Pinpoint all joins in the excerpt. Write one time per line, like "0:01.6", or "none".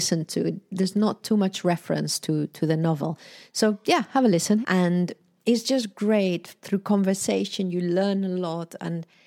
0:04.6